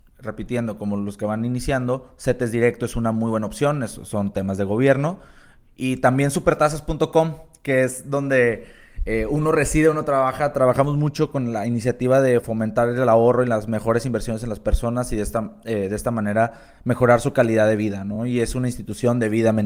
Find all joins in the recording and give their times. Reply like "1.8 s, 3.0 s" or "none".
none